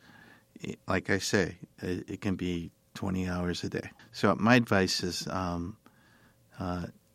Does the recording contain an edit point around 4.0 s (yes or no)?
yes